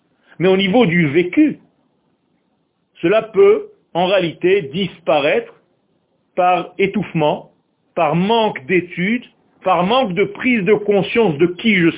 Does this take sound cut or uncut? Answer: uncut